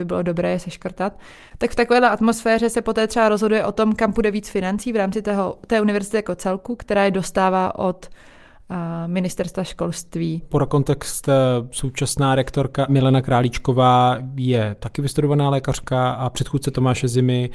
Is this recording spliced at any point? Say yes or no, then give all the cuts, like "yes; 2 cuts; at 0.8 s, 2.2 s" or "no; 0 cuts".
no; 0 cuts